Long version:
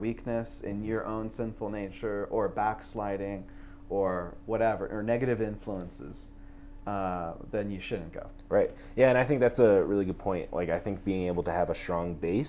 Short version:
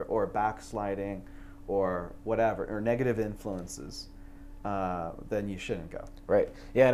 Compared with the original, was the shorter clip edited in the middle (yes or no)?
no